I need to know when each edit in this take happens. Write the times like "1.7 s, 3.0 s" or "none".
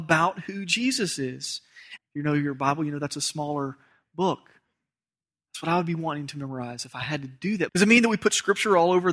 2.0 s, 7.7 s